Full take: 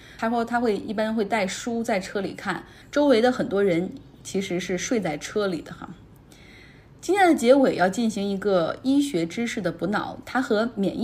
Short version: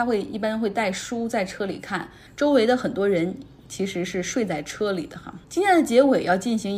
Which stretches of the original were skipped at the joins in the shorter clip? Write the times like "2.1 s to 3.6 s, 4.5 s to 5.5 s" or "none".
6.0 s to 7.0 s